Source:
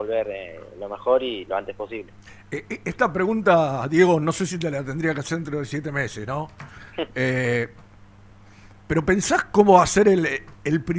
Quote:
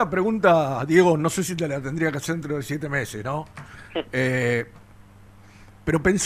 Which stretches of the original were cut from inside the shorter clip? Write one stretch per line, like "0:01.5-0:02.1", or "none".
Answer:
none

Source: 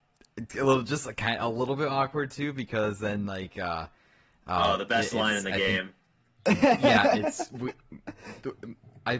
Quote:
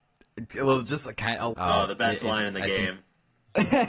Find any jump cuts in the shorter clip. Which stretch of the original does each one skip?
0:01.5-0:04.4

